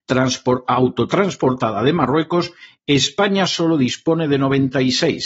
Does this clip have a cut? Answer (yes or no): no